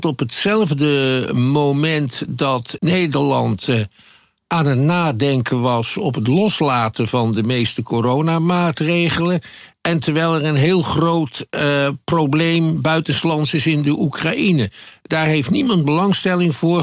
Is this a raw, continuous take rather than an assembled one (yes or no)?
no